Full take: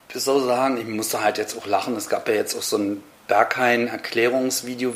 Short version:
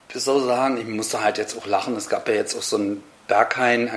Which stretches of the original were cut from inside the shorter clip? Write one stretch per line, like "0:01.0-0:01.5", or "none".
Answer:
none

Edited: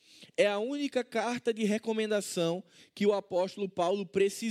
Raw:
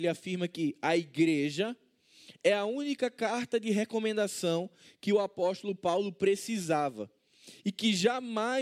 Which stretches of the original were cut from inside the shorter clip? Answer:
none

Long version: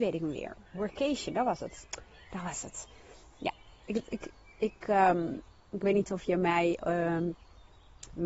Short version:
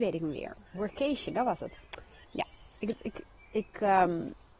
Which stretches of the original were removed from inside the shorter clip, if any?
0:02.2-0:03.3

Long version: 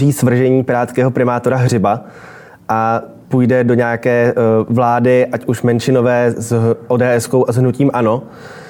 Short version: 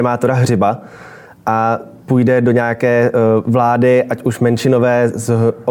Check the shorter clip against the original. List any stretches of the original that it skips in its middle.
none

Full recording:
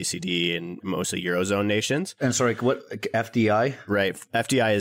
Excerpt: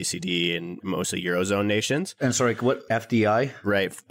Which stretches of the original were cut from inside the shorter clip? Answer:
0:02.9-0:03.1

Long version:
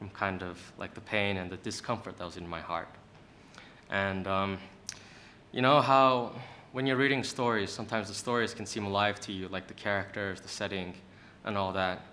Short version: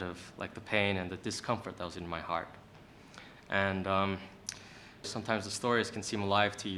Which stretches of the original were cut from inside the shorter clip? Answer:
0:05.4-0:07.7

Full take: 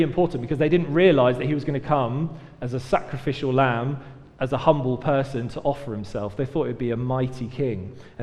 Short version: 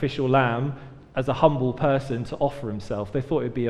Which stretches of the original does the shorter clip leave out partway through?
none

